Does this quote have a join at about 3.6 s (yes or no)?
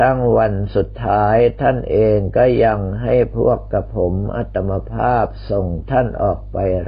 no